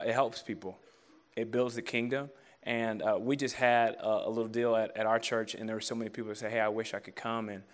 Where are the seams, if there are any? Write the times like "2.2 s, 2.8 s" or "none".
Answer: none